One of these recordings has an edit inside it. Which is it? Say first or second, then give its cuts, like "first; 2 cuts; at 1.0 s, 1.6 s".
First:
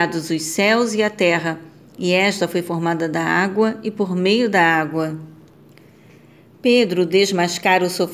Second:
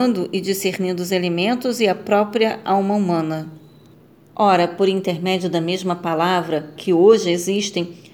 second; 2 cuts; at 4.3 s, 6.8 s